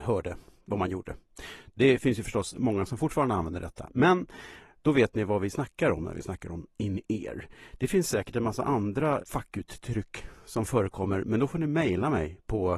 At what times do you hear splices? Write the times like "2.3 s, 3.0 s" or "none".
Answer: 9.2 s